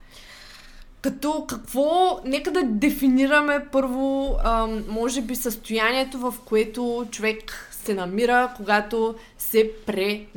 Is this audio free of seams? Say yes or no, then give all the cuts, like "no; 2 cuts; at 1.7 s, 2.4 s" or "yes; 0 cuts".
yes; 0 cuts